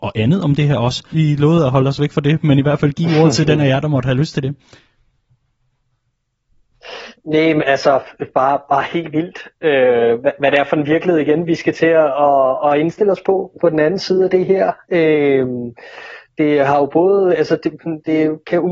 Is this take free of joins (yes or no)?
no